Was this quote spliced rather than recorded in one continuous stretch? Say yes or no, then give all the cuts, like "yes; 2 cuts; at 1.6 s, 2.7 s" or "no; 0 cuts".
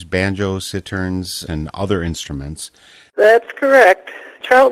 yes; 2 cuts; at 1.5 s, 3.1 s